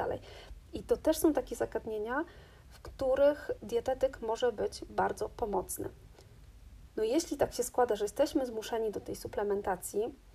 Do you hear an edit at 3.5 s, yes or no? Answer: no